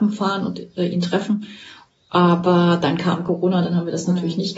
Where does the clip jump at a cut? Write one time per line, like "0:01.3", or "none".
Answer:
none